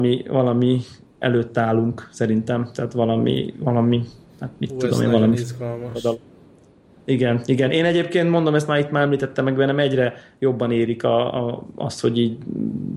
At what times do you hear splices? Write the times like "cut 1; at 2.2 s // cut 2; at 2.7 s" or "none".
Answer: none